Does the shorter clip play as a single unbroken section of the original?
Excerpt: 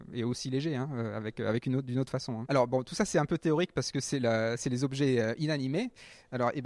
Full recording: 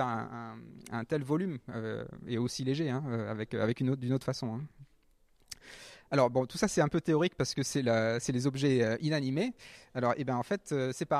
no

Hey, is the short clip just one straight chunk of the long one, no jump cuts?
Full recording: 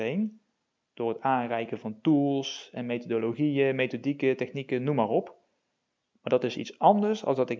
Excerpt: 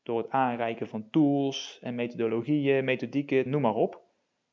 no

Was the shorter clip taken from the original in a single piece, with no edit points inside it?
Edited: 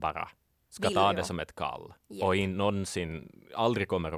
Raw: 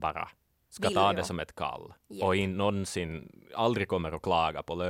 yes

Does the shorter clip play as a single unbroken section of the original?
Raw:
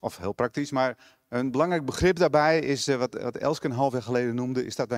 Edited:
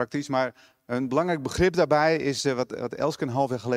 yes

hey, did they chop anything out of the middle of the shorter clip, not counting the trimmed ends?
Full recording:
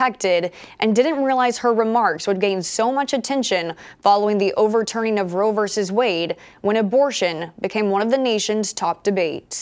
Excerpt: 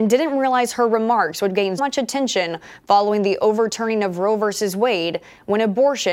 yes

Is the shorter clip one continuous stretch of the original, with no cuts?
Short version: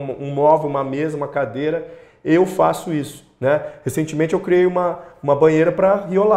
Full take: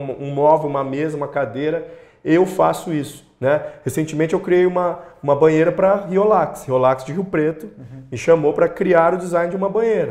yes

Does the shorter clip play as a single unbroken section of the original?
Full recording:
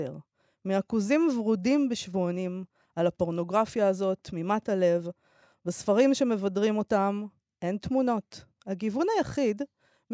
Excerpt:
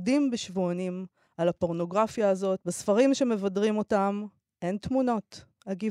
no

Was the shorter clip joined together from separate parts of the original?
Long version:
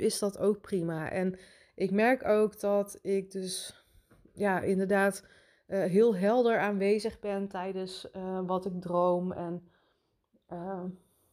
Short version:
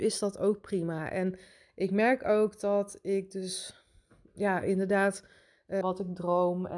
yes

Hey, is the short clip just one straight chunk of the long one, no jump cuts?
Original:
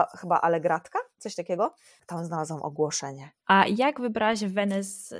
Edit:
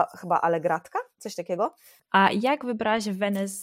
no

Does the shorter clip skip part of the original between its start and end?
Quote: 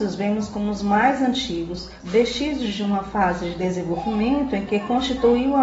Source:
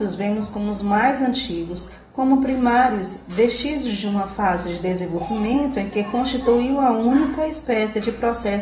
yes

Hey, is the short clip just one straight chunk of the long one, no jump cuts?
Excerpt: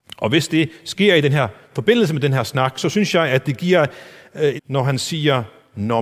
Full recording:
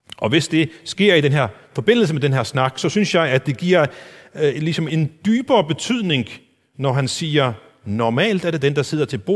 no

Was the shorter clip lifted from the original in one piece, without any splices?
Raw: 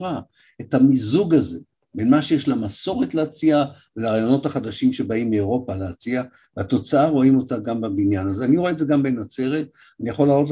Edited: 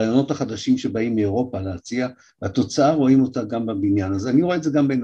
yes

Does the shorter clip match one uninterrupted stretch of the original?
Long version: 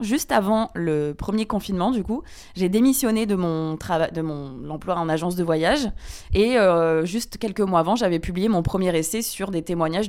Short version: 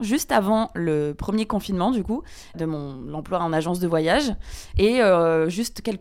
no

